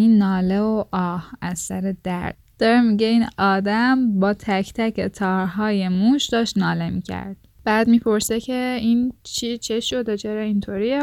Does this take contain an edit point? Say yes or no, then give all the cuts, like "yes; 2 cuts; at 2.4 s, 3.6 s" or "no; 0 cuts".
yes; 1 cut; at 7.5 s